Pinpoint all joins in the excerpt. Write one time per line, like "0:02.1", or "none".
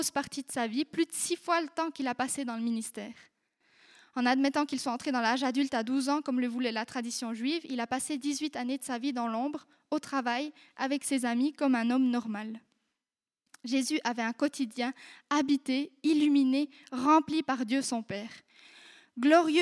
none